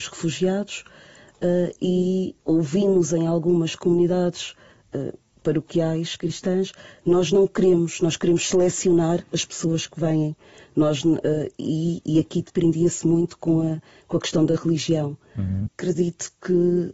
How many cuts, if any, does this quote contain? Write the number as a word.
one